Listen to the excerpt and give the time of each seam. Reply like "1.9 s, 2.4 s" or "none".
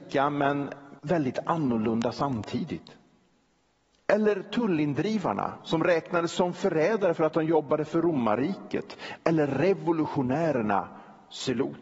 1.0 s